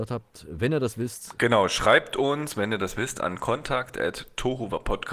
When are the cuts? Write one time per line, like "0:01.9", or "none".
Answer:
none